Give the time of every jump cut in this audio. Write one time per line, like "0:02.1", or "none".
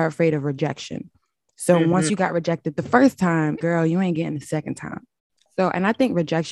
0:03.6
0:05.5